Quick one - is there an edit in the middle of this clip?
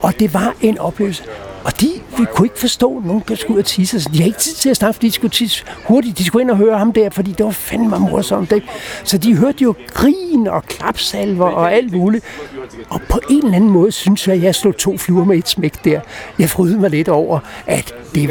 no; 0 cuts

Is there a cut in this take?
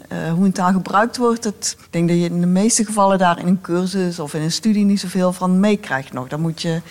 yes; 1 cut; at 1.8 s

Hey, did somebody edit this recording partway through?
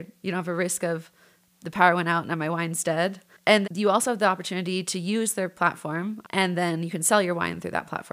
yes; 2 cuts; at 3.6 s, 6.2 s

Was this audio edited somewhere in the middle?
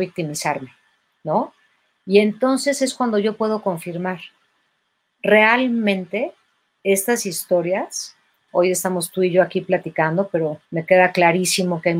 yes; 2 cuts; at 8.5 s, 10.6 s

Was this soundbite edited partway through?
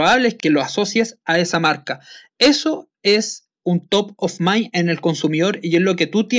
no; 0 cuts

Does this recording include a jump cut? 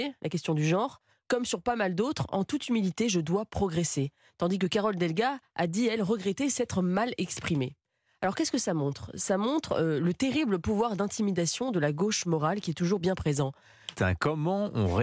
yes; 1 cut; at 13.9 s

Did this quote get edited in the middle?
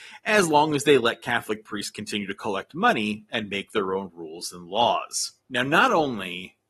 yes; 1 cut; at 5.4 s

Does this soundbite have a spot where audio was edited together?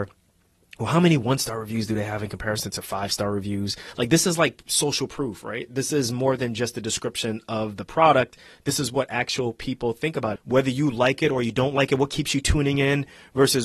yes; 1 cut; at 10.4 s

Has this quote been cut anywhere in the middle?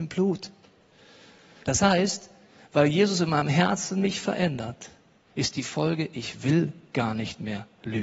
yes; 1 cut; at 1.6 s

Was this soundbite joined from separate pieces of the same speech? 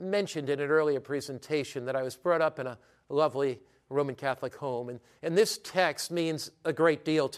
no; 0 cuts

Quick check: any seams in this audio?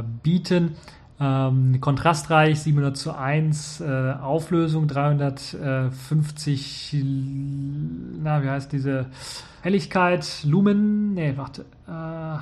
yes; 1 cut; at 9.6 s

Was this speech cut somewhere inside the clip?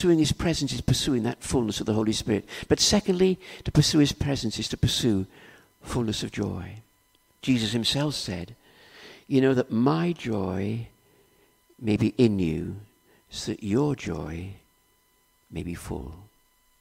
yes; 1 cut; at 7.4 s

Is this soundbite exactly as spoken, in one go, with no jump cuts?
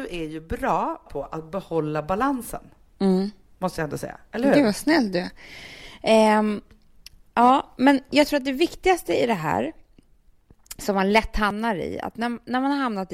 yes; 0 cuts

